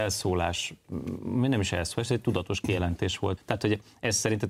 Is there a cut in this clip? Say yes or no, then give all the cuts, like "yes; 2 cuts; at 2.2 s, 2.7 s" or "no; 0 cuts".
yes; 1 cut; at 3.4 s